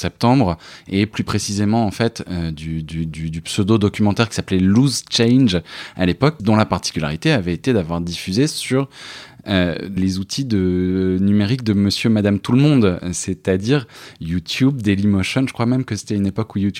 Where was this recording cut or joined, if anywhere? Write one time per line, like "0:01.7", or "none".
0:06.4
0:10.0